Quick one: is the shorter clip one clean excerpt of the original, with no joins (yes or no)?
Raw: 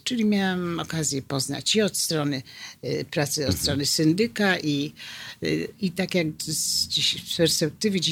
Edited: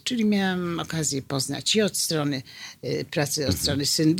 yes